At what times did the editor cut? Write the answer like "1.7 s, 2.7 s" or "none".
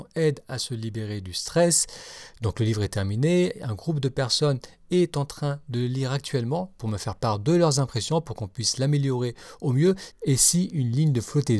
10.1 s